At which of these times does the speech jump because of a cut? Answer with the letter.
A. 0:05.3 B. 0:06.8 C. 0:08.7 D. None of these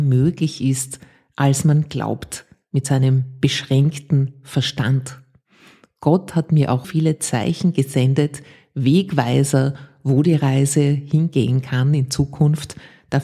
B